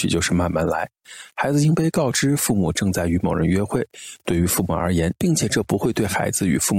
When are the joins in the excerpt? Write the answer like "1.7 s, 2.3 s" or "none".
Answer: 5.2 s